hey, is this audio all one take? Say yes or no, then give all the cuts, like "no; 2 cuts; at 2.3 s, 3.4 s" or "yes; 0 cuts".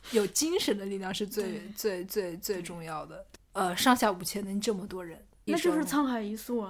no; 2 cuts; at 3.4 s, 5.5 s